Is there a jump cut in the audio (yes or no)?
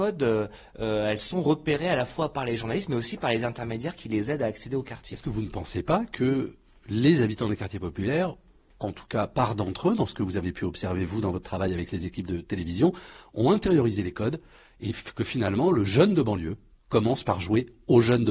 no